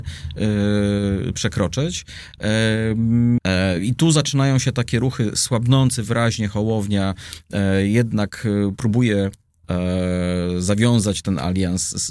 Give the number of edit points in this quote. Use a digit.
1